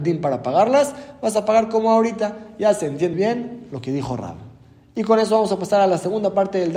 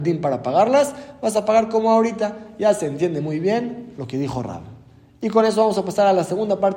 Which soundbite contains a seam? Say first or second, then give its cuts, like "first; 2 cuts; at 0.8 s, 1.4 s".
first; 1 cut; at 3.1 s